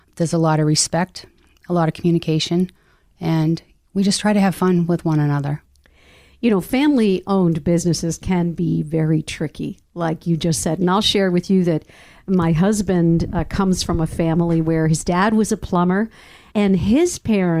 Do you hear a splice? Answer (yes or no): no